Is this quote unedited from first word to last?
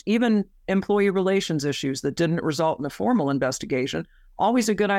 yes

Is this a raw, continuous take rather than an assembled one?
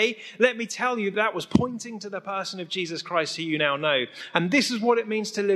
yes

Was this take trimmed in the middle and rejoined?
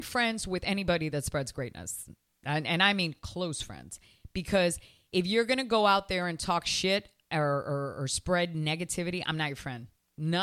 no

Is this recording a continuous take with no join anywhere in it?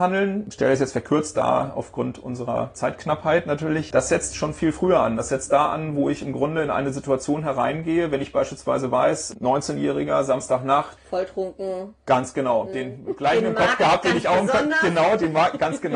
yes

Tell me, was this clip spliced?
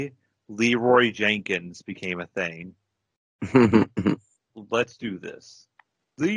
yes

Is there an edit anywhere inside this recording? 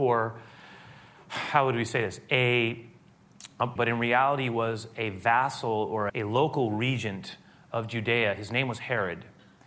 yes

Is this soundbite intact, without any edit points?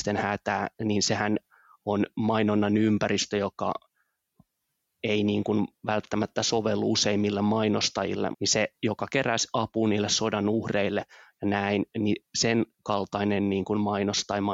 no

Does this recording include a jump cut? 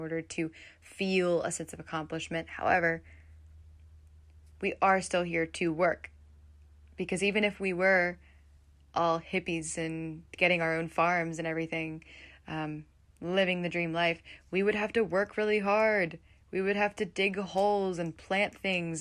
no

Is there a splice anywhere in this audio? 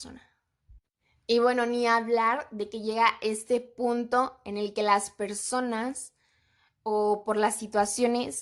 no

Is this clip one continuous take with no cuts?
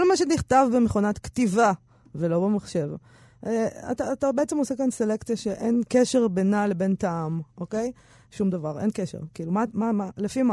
yes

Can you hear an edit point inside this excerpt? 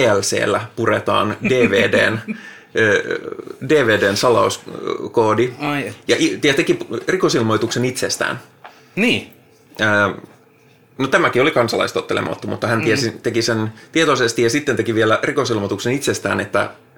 no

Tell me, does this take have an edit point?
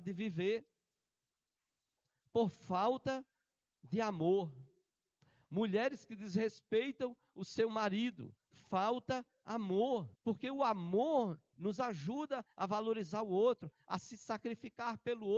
yes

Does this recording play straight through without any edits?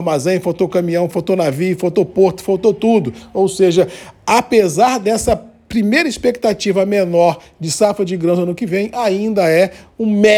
no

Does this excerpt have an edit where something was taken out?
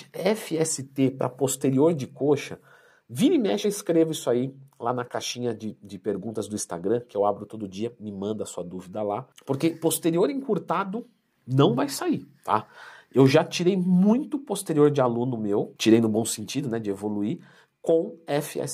no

